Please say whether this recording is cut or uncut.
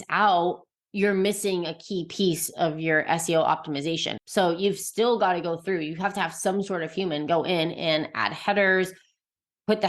cut